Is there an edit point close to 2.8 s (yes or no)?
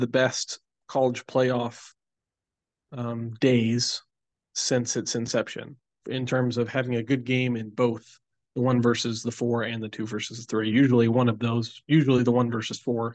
no